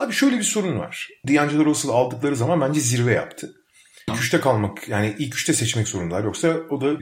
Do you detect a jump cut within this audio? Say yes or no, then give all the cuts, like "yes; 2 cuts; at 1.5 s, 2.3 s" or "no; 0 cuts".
yes; 2 cuts; at 1.2 s, 4.1 s